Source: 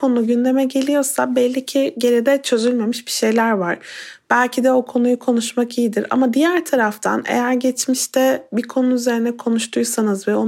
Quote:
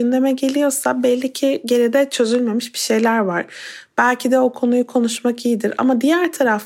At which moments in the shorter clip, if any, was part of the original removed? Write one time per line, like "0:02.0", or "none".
none